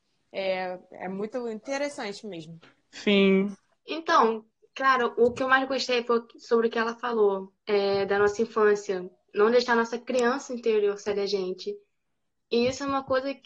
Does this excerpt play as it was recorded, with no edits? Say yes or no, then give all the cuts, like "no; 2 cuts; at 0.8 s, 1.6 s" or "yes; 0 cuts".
no; 1 cut; at 3.7 s